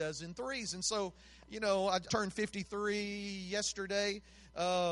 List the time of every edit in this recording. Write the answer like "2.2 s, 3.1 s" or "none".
2.1 s